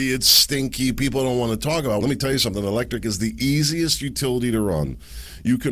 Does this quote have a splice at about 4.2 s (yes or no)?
no